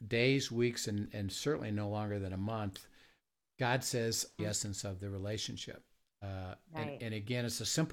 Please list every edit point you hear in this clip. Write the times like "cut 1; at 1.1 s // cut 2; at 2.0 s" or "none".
cut 1; at 4.4 s